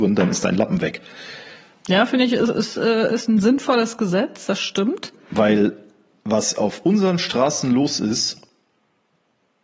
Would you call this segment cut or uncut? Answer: uncut